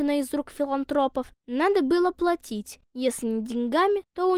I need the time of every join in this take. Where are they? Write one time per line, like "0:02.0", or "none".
none